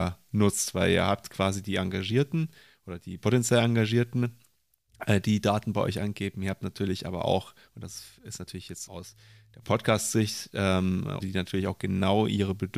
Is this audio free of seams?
no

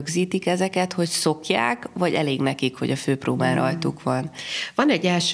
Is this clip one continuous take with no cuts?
yes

